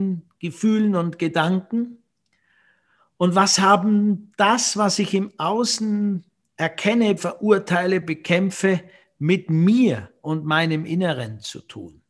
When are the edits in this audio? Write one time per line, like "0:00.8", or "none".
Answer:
0:07.2